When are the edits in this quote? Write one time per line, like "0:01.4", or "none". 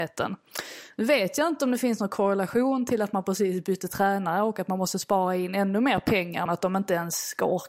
0:00.9
0:06.5